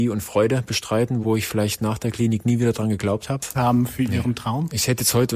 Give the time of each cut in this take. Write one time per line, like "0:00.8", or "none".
0:01.2
0:03.5